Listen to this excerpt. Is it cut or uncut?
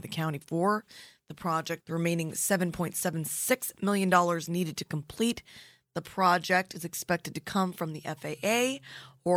cut